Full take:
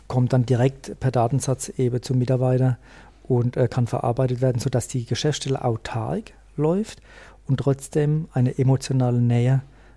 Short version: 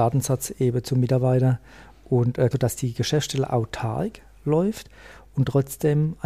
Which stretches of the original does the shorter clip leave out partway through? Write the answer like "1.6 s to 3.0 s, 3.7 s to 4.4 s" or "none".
3.7 s to 4.6 s